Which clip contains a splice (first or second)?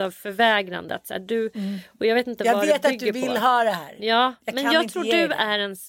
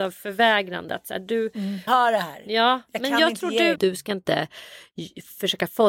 second